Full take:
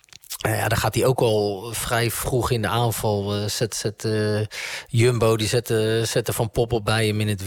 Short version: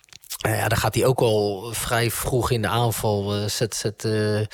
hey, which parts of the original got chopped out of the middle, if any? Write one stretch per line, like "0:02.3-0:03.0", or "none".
none